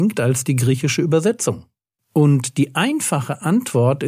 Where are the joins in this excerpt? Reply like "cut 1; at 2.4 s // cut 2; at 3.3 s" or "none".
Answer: cut 1; at 1.9 s